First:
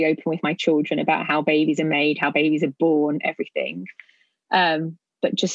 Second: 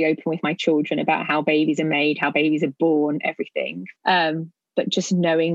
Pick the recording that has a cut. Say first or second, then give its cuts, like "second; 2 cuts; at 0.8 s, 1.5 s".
second; 1 cut; at 4.0 s